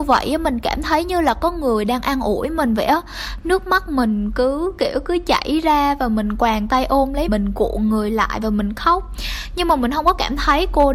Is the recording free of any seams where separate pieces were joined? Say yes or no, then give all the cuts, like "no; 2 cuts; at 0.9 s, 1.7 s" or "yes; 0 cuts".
no; 1 cut; at 7.3 s